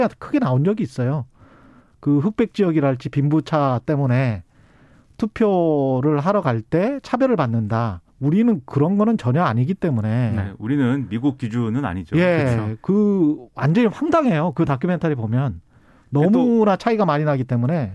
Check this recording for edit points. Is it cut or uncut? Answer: cut